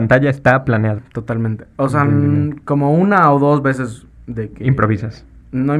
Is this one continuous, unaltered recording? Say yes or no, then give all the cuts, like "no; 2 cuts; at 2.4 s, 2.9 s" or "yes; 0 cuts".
no; 1 cut; at 1.0 s